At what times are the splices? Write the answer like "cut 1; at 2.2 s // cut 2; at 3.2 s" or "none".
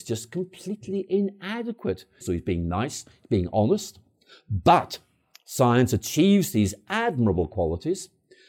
cut 1; at 2.2 s

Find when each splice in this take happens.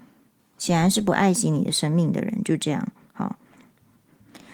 none

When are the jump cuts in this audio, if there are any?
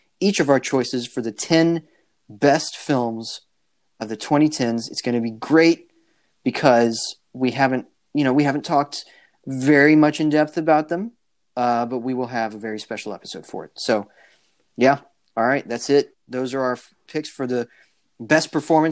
cut 1; at 16.1 s

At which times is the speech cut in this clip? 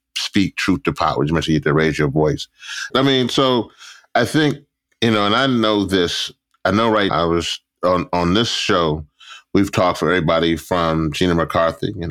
cut 1; at 2.9 s // cut 2; at 7.1 s

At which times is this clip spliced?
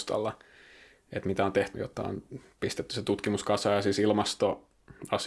cut 1; at 1.7 s

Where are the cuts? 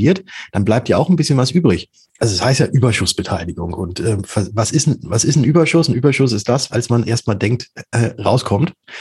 cut 1; at 2.0 s // cut 2; at 6.7 s

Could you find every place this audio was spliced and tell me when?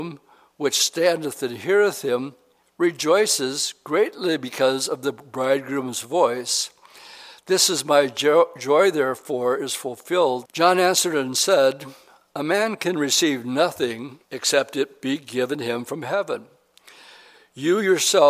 cut 1; at 10.4 s // cut 2; at 14.2 s

